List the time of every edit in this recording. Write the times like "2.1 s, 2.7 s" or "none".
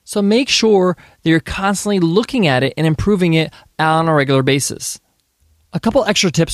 none

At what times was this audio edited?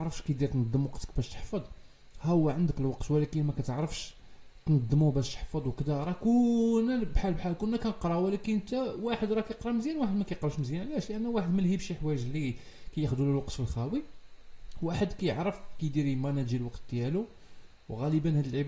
none

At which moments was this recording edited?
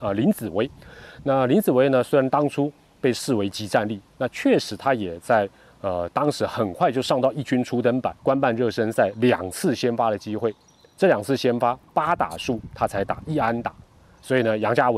8.2 s

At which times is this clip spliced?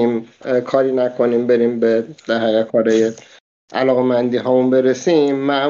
none

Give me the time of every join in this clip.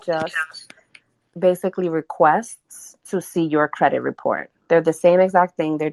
none

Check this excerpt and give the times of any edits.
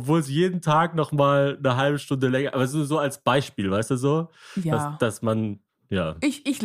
none

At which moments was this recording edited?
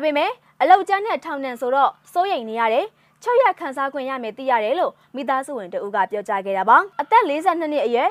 6.9 s

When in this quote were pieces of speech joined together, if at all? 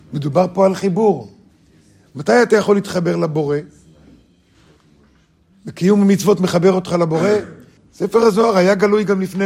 7.8 s

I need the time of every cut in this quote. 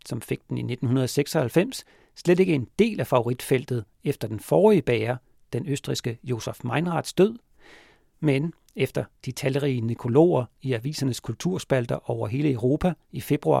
none

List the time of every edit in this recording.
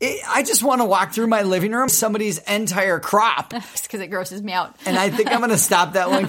1.9 s, 3.7 s

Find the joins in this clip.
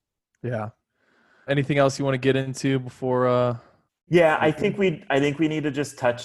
1.5 s

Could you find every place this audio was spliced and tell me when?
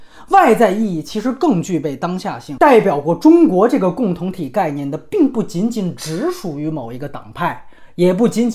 2.6 s

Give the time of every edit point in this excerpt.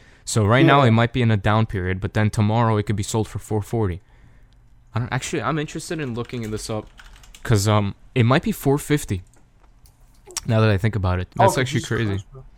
4.9 s, 11.3 s

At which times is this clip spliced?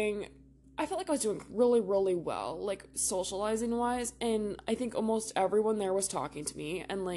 none

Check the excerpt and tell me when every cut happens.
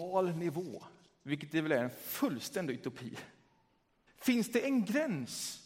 4.1 s

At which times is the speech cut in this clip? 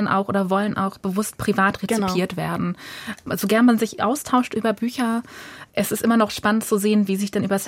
none

